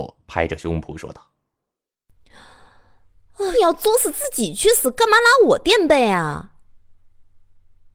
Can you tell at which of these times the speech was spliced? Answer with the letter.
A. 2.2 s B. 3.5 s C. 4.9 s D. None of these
B